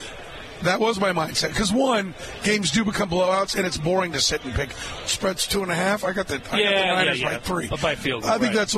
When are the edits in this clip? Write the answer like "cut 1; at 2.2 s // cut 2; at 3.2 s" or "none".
none